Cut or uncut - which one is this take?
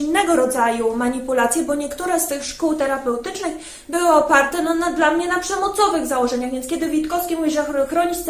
uncut